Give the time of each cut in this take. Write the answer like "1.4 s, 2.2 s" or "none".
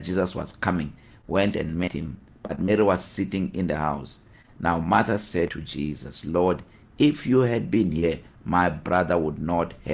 none